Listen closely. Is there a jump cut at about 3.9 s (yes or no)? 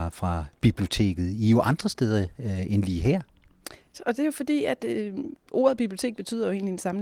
yes